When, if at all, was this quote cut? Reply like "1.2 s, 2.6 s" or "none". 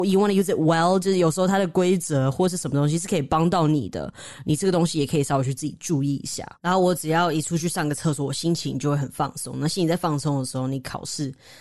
none